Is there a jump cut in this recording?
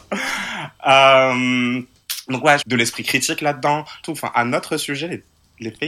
yes; 2 cuts; at 2.6 s, 4.0 s

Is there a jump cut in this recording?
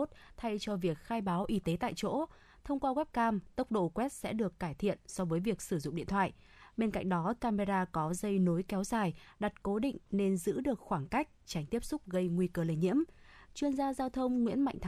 no; 0 cuts

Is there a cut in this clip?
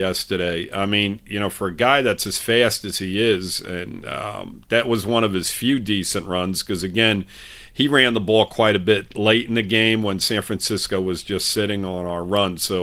no; 0 cuts

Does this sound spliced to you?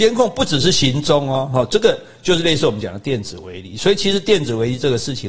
no; 0 cuts

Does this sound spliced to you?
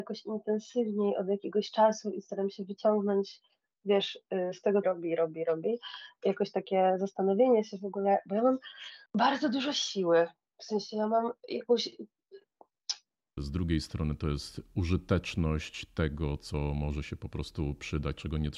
yes; 3 cuts; at 4.8 s, 9.1 s, 13.4 s

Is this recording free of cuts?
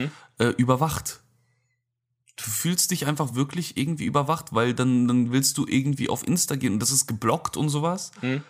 yes; 0 cuts

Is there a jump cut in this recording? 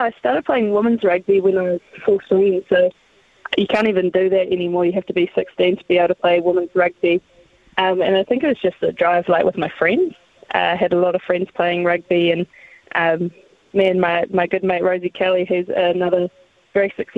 no; 0 cuts

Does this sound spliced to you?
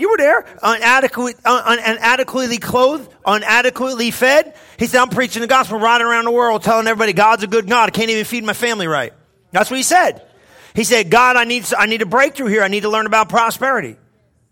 no; 0 cuts

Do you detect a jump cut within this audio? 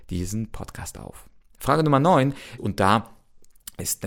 yes; 1 cut; at 2.6 s

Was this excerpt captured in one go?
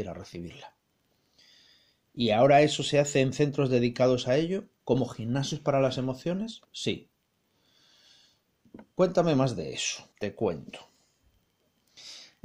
no; 2 cuts; at 6.6 s, 10.1 s

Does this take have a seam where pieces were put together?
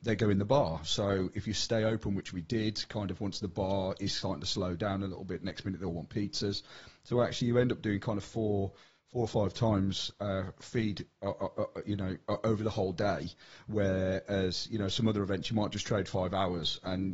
no; 0 cuts

